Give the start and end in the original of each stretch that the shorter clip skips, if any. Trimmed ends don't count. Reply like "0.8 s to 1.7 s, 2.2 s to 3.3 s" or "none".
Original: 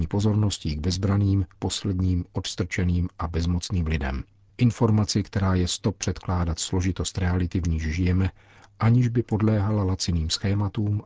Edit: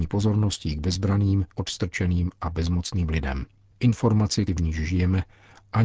1.5 s to 2.3 s, 5.2 s to 7.5 s